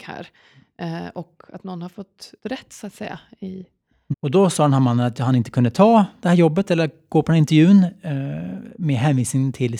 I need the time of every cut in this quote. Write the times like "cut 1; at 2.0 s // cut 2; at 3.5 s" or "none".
cut 1; at 2.4 s // cut 2; at 4.1 s